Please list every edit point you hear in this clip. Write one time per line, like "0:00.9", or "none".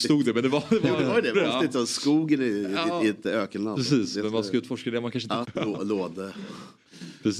0:01.3
0:05.4